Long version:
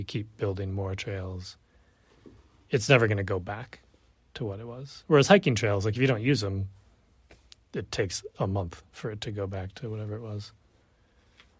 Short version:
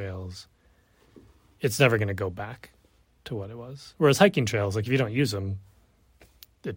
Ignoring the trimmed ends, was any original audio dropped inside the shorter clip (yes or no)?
no